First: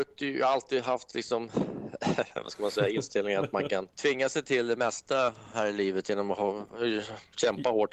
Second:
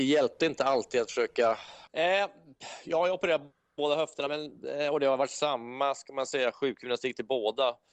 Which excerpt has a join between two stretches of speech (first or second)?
second